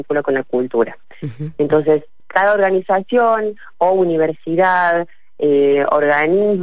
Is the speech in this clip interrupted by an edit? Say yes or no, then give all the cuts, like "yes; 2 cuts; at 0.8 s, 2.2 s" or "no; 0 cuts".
yes; 1 cut; at 2.2 s